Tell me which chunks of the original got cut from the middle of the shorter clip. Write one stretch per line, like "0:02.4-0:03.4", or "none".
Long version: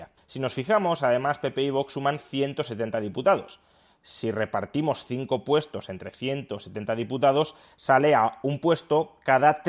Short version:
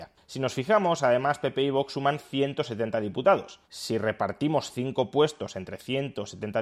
0:03.6-0:04.0